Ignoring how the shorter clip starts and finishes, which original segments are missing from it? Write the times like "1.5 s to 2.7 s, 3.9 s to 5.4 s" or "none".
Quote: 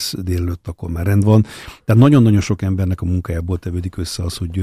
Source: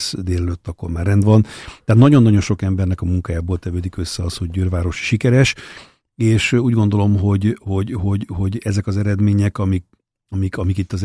none